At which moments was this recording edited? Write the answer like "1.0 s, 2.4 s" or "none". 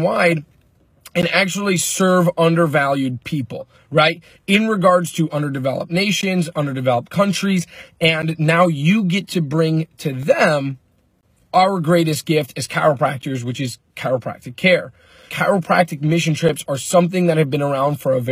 15.3 s